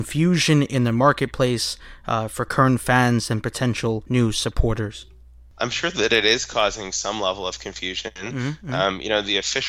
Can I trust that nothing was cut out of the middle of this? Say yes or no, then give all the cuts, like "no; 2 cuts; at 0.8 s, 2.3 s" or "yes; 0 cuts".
yes; 0 cuts